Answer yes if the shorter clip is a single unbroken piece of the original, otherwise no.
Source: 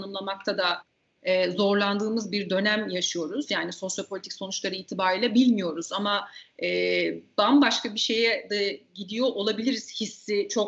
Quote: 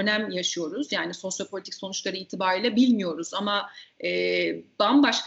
yes